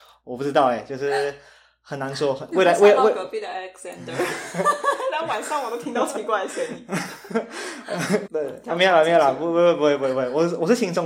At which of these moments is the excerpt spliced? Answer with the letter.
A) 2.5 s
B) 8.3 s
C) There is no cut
B